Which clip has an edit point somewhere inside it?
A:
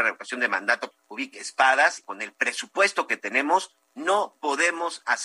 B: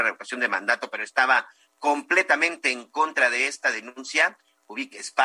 A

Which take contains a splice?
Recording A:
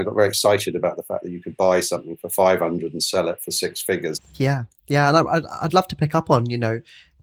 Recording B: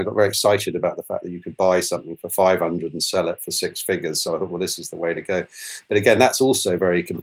A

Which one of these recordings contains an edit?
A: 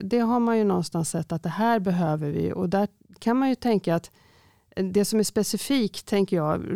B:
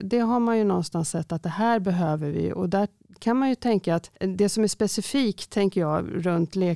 B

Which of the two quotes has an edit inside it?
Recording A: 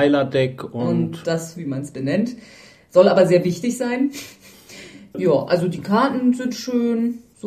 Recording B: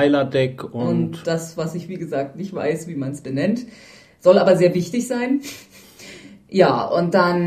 A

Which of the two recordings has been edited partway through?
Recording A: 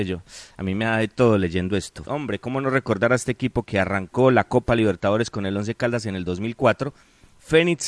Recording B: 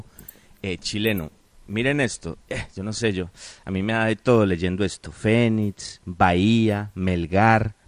A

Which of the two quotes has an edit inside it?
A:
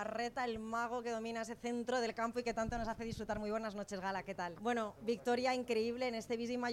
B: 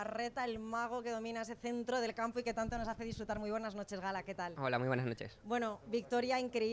A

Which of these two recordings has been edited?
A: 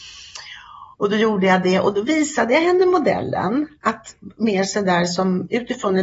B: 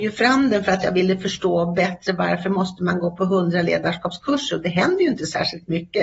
A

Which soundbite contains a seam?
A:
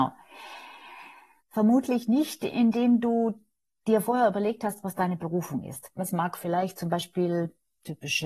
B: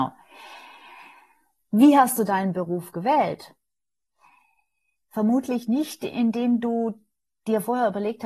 A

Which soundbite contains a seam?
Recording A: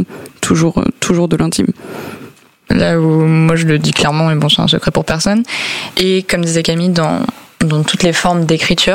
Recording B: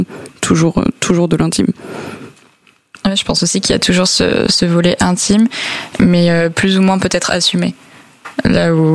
A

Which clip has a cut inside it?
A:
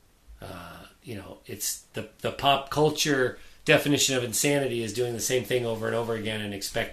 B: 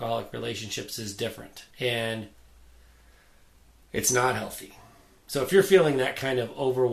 B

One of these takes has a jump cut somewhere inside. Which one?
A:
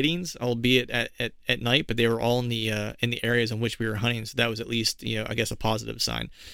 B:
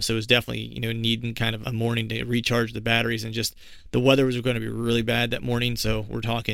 B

